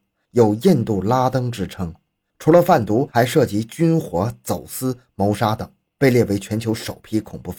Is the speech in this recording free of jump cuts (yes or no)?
no